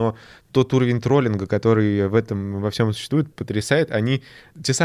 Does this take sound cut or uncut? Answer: cut